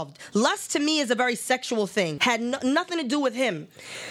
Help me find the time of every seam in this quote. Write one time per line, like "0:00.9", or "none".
0:02.2